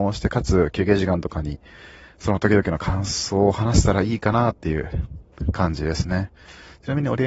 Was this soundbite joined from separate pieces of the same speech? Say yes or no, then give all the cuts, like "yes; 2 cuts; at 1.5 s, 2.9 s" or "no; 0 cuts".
no; 0 cuts